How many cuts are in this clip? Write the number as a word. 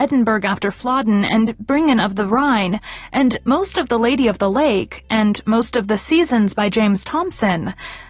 zero